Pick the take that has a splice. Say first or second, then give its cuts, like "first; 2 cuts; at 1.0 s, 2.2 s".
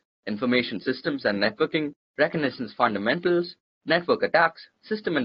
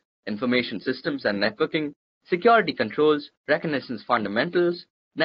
first; 1 cut; at 2.1 s